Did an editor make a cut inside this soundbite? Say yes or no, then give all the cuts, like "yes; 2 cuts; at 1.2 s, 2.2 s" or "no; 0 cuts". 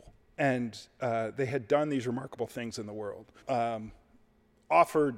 yes; 1 cut; at 3.4 s